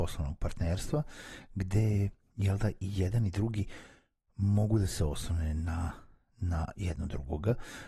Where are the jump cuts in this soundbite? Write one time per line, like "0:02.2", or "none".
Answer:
none